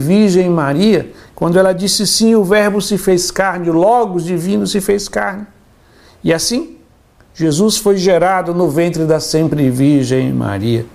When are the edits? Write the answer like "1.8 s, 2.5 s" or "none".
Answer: none

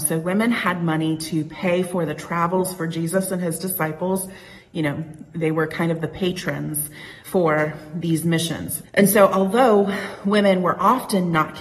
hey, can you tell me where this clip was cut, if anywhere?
7.2 s, 8.8 s

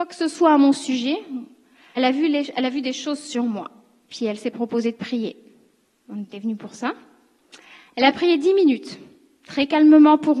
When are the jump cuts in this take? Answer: 2.0 s

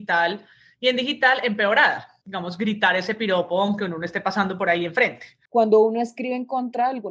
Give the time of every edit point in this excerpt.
2.2 s, 5.5 s

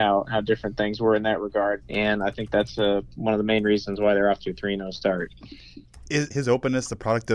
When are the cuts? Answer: 1.8 s, 6.3 s

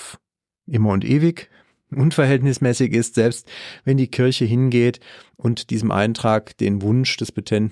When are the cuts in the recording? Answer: none

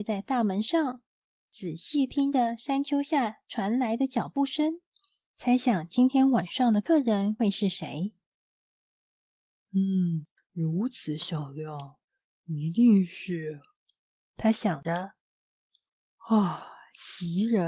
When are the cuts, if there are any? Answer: 10.4 s

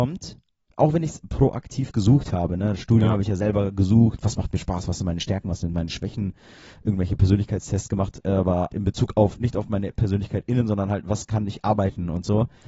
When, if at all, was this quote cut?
8.7 s

